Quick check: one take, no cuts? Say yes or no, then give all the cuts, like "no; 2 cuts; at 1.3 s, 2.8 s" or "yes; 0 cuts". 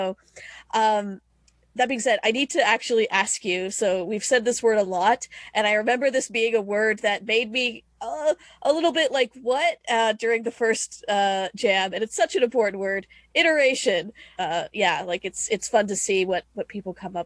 no; 1 cut; at 14.4 s